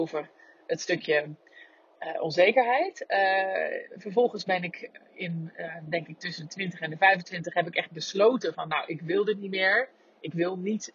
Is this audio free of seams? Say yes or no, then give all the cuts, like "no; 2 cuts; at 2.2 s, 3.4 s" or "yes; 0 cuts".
yes; 0 cuts